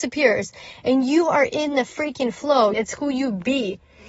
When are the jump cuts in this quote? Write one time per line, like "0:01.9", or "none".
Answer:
0:02.7